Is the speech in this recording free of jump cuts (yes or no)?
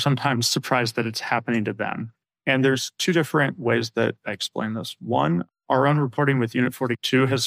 yes